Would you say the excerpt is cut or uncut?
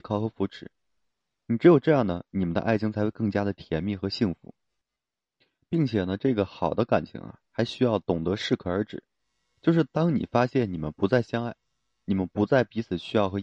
uncut